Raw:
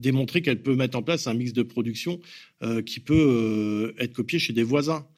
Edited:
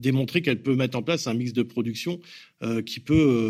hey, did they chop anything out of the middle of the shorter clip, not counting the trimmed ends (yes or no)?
no